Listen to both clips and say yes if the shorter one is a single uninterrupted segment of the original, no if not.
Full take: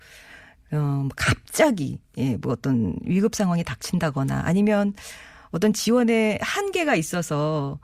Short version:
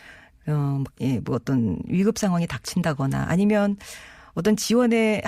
no